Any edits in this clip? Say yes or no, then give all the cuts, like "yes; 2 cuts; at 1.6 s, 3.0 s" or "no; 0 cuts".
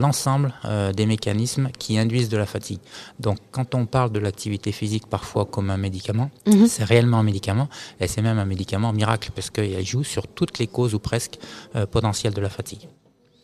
yes; 1 cut; at 6.4 s